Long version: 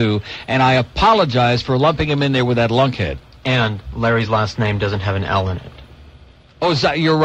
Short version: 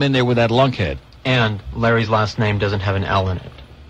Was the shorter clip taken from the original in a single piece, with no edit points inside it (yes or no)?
yes